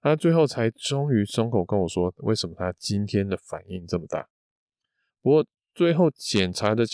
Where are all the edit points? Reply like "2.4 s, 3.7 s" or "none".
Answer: 5.1 s

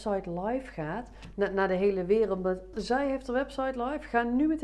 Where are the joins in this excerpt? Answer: 1.3 s, 2.7 s

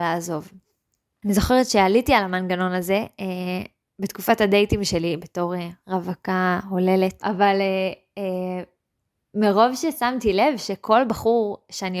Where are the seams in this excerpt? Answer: 7.2 s

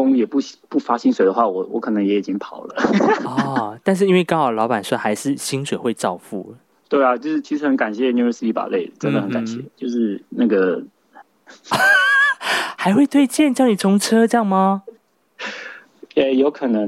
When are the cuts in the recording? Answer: 11.2 s

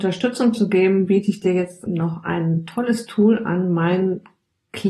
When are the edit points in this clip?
1.9 s

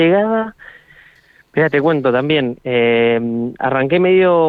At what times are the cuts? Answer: none

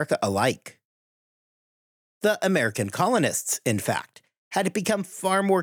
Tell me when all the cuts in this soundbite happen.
none

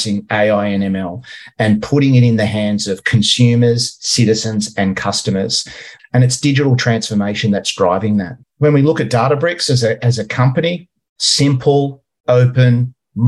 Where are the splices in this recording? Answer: 6.0 s, 8.4 s

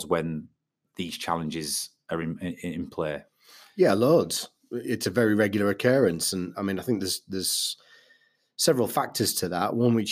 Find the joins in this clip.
6.5 s

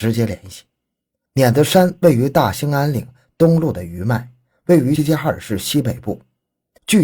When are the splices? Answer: 5.0 s

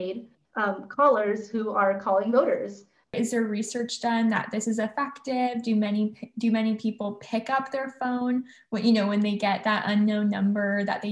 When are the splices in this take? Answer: 3.0 s

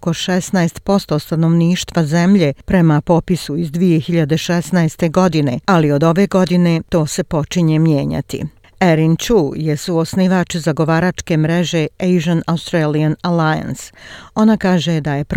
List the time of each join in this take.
5.6 s

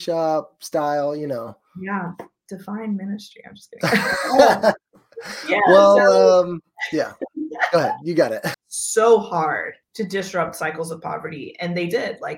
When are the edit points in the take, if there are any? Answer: 8.5 s, 9.8 s

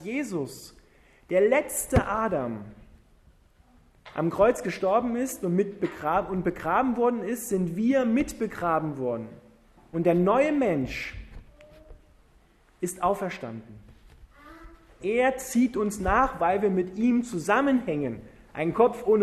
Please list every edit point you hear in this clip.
9.9 s, 15.0 s

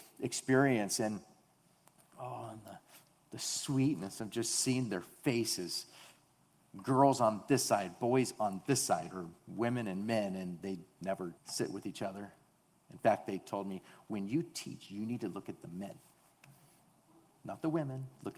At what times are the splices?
11.4 s

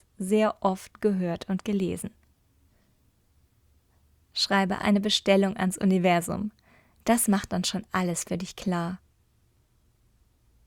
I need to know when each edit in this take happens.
4.8 s

